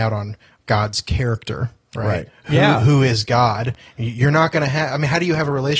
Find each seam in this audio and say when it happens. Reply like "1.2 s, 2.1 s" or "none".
none